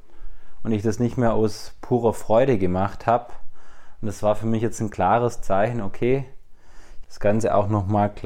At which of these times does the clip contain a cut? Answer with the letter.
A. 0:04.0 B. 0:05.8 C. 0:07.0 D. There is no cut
C